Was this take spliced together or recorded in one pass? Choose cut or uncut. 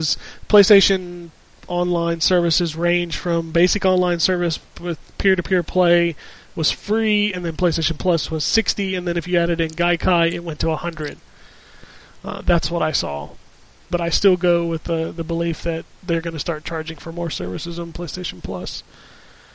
cut